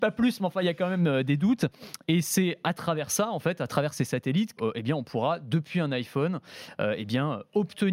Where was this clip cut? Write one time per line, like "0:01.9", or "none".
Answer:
0:04.6

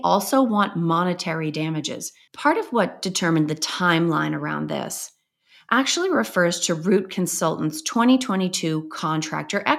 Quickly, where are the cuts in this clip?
0:02.3

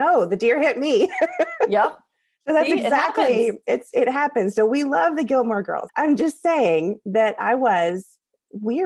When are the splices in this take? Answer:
0:05.9

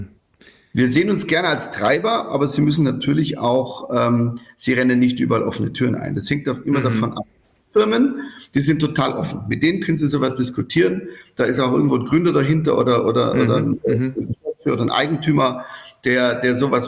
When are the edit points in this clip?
none

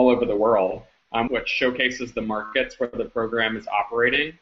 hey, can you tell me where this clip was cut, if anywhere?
0:01.3

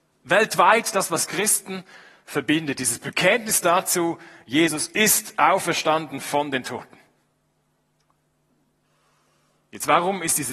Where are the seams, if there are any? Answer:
none

